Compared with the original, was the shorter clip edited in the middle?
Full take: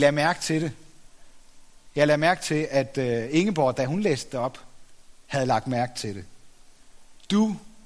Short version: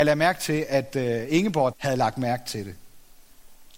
yes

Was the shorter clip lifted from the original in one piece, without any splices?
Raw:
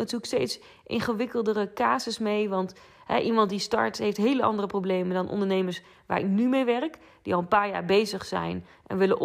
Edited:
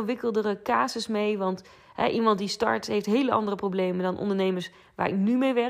yes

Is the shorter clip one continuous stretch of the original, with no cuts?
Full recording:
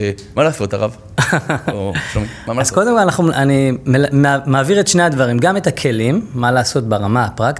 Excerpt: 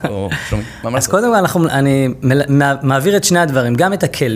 yes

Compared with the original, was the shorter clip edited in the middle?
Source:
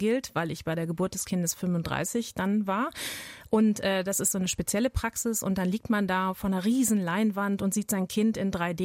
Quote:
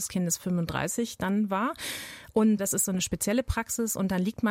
yes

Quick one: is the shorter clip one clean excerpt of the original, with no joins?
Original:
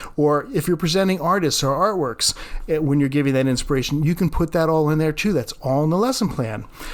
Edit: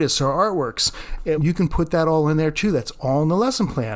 no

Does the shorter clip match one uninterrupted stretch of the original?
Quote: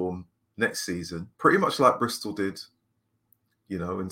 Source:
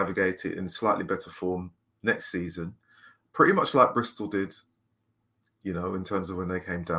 no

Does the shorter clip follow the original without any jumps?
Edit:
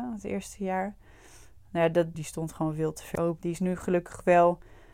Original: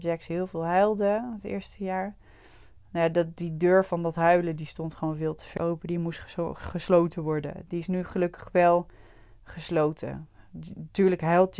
no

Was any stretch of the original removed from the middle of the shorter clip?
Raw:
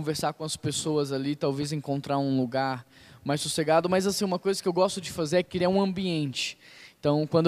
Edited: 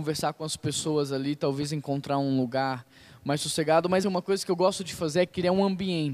yes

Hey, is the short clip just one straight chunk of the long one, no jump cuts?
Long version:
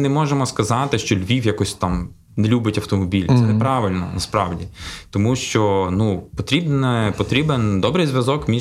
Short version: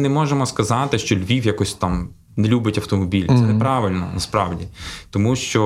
yes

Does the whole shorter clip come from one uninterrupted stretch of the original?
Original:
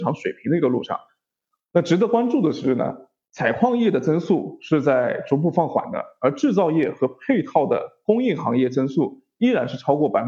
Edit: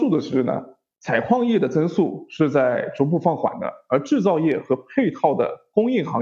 yes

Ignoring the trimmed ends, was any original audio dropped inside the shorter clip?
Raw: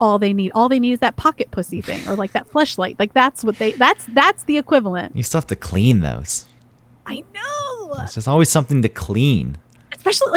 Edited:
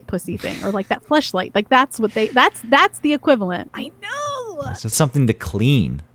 yes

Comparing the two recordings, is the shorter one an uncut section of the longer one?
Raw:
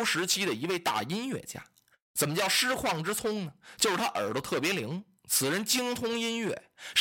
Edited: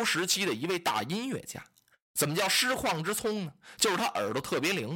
yes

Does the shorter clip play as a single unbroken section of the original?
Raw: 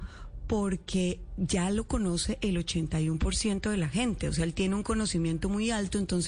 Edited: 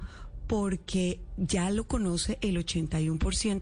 yes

